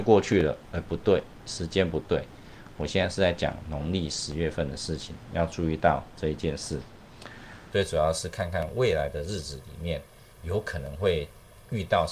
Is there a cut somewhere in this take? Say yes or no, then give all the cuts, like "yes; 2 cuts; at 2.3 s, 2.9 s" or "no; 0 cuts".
yes; 1 cut; at 7.7 s